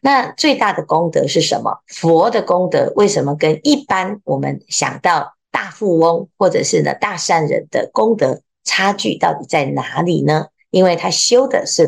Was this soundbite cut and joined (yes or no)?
yes